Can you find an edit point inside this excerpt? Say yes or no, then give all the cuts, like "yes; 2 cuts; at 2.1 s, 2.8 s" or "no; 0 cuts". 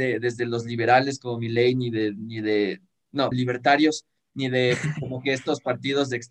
yes; 1 cut; at 3.3 s